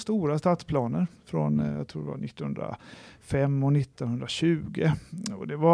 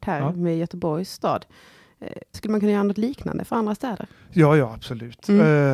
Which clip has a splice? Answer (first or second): second